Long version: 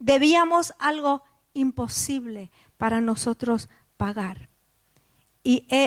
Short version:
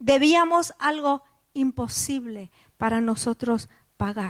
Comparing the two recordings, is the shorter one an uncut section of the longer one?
yes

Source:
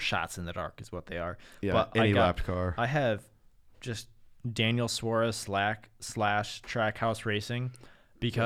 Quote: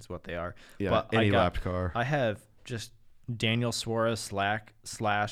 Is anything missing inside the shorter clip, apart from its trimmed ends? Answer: yes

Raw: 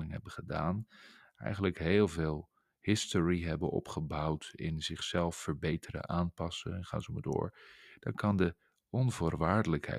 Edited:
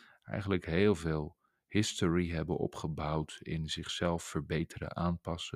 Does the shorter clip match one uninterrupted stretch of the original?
yes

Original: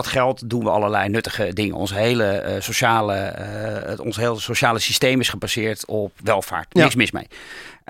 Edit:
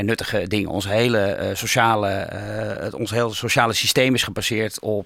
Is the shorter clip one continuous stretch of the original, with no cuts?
yes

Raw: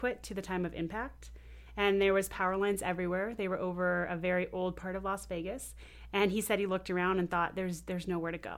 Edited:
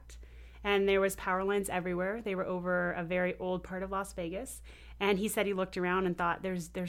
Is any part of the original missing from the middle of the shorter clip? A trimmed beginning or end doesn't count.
no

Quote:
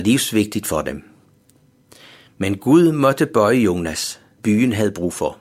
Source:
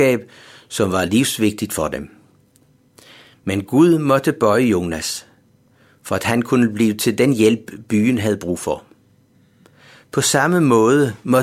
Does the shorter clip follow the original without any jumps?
no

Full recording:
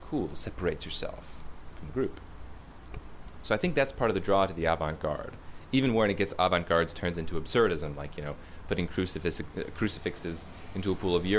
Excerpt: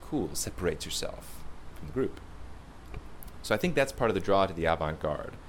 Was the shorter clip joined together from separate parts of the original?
no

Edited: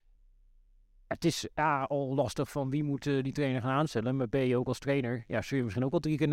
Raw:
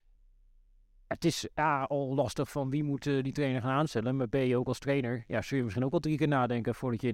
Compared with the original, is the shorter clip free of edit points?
yes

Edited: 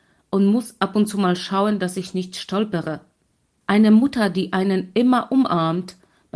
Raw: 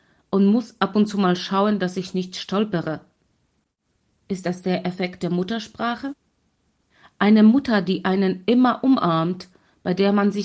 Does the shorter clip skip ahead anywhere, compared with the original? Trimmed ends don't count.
yes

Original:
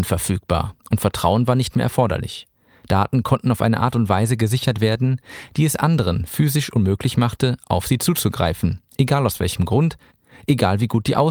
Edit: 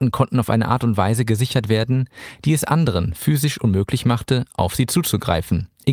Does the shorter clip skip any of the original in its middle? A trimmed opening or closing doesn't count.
no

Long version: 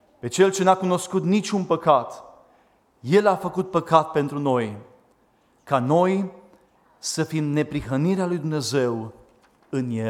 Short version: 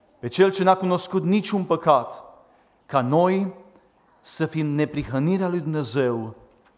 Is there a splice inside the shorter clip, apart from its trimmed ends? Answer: yes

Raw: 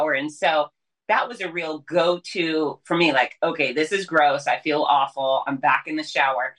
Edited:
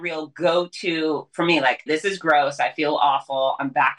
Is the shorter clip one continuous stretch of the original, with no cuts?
no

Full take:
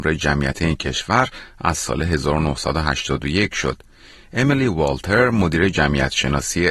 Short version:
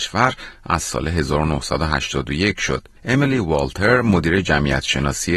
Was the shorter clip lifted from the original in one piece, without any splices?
no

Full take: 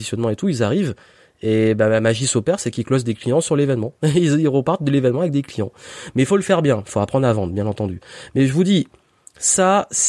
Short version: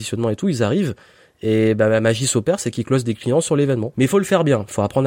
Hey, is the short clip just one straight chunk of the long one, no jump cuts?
no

